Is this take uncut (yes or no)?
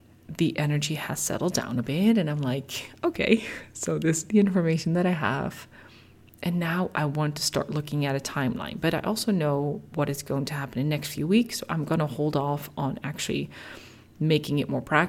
yes